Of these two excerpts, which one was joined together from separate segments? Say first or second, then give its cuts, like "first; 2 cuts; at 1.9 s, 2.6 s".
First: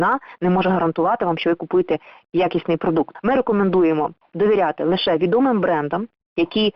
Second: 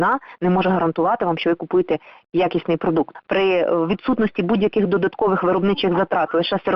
second; 1 cut; at 3.2 s